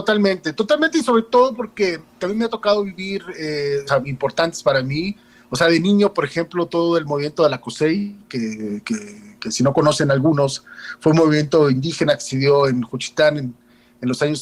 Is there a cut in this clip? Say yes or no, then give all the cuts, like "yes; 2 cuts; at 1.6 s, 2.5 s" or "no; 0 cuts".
yes; 1 cut; at 3.9 s